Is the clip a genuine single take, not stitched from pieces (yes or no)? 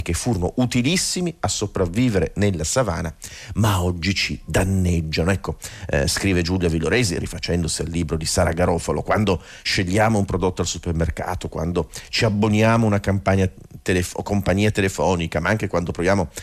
yes